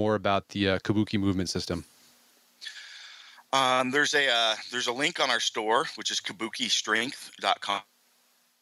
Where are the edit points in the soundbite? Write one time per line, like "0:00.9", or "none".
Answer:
none